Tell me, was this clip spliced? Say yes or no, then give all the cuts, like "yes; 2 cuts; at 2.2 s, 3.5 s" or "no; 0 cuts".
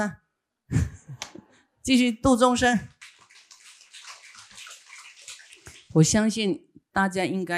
no; 0 cuts